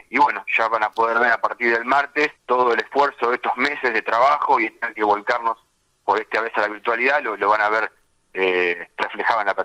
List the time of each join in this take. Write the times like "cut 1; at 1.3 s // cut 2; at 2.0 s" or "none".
cut 1; at 2.4 s